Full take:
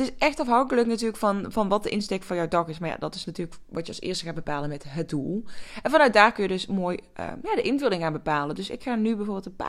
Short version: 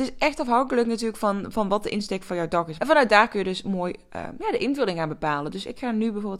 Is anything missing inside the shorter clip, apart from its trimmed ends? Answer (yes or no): yes